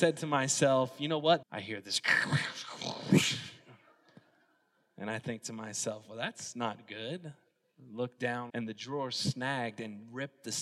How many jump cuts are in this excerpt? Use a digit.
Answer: 2